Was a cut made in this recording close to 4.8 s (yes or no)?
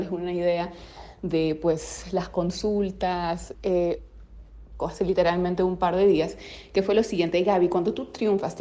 yes